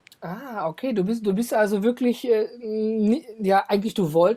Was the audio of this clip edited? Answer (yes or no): no